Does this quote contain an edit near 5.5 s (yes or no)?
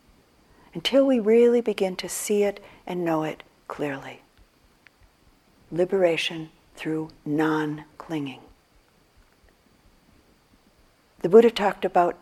yes